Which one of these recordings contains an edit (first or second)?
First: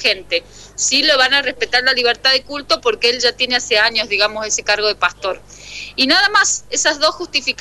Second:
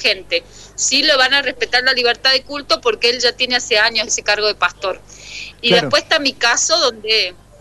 second